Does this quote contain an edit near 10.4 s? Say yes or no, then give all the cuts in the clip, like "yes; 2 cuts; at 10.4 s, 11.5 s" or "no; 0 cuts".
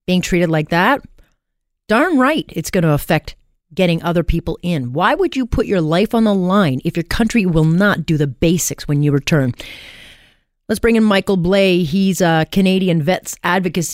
no; 0 cuts